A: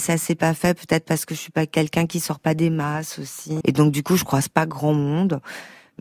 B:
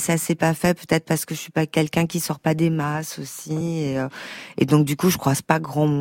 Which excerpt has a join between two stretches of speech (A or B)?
A